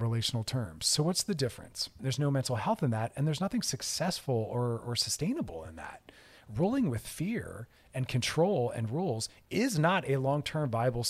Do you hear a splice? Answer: yes; 1 cut; at 2.0 s

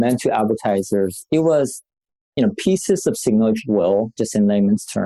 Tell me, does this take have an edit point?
no; 0 cuts

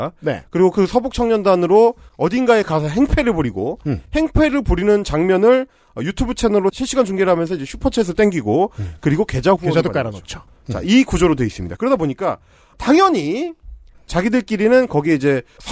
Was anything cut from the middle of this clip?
yes; 1 cut; at 13.9 s

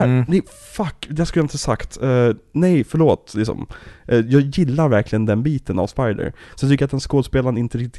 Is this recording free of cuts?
yes; 0 cuts

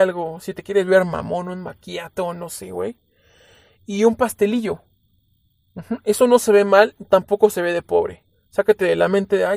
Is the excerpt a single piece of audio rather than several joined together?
yes; 0 cuts

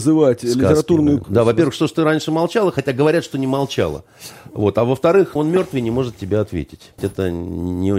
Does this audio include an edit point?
yes; 3 cuts; at 1.2 s, 5.4 s, 7.0 s

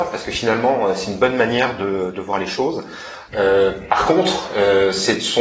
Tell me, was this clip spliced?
yes; 1 cut; at 3.3 s

